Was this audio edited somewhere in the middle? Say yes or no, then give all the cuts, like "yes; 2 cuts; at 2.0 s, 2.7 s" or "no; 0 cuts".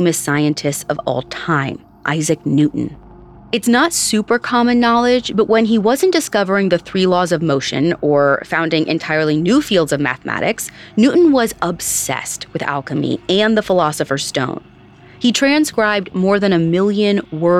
no; 0 cuts